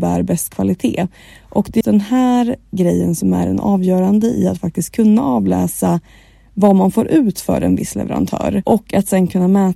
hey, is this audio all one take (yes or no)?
no